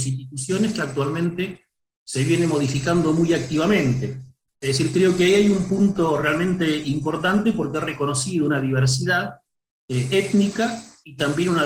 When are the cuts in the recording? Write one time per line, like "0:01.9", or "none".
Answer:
0:04.5